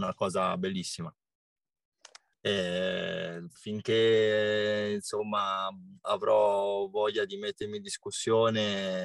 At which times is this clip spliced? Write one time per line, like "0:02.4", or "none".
0:02.3
0:03.5